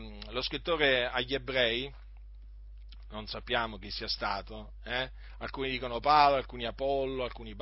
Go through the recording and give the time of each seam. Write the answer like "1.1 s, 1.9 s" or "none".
none